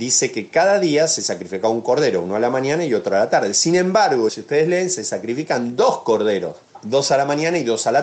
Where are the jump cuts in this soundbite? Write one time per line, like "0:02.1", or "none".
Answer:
0:04.3